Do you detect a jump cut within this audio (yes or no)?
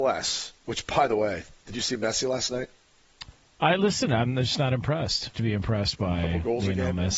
yes